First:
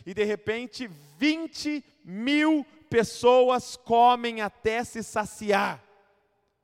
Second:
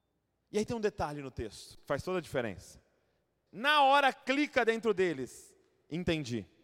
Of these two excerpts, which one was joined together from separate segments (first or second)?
second